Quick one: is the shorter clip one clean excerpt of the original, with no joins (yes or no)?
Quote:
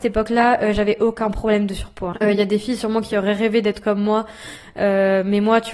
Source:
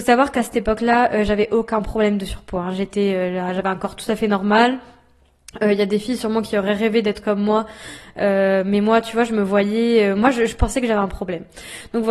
no